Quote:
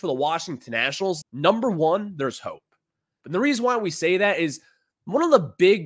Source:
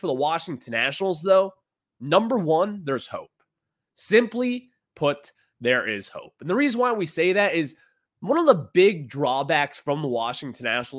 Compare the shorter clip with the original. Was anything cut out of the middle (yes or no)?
yes